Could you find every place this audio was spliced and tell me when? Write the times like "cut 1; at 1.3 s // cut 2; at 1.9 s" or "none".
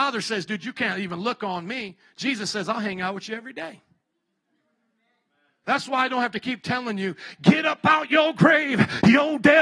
cut 1; at 5.6 s